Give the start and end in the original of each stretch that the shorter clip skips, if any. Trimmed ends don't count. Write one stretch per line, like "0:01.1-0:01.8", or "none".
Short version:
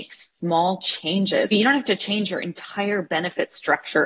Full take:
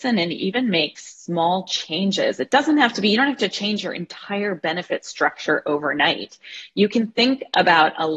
0:02.4-0:03.0